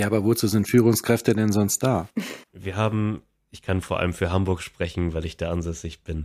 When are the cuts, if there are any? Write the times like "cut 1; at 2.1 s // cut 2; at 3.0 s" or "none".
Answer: cut 1; at 2.4 s